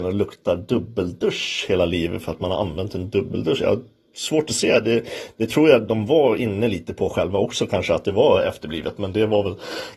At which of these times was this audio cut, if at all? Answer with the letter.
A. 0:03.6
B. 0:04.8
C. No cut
C